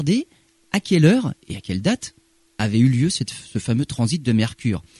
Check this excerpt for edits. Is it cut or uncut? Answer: uncut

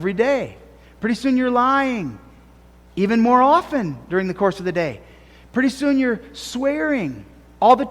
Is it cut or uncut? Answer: uncut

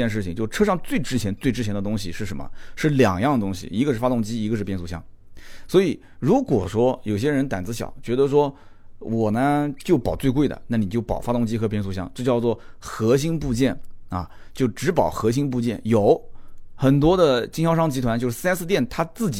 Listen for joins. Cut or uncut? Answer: uncut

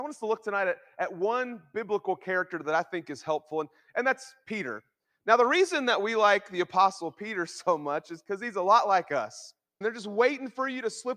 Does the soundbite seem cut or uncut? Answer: cut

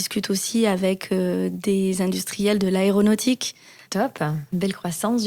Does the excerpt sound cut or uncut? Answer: cut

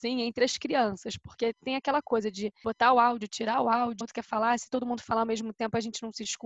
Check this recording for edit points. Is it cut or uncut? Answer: cut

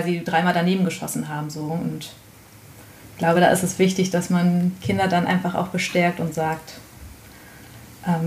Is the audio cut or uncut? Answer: uncut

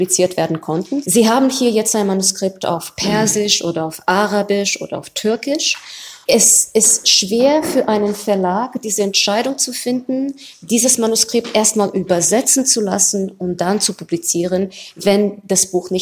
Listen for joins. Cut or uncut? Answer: cut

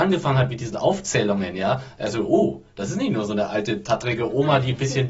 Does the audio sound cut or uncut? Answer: uncut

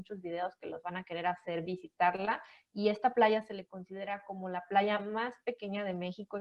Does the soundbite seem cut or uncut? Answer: uncut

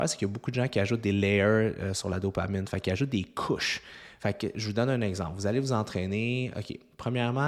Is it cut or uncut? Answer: uncut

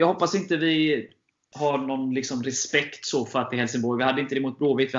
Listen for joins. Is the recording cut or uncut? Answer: uncut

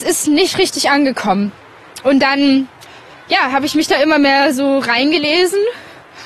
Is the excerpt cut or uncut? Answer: cut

